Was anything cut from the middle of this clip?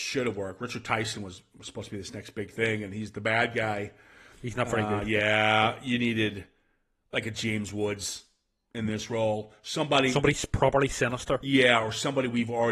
no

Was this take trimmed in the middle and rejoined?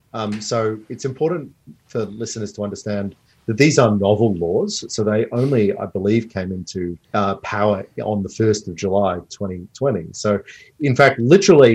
yes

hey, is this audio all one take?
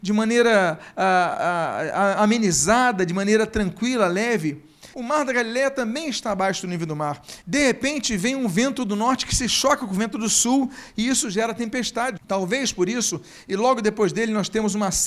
no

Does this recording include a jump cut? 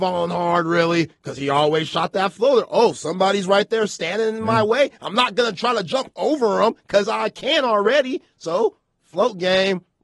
no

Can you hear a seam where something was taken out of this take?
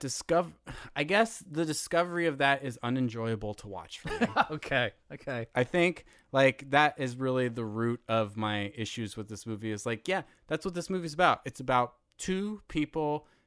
no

